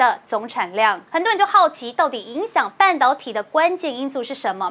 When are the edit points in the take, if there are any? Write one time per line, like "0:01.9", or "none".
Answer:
0:01.1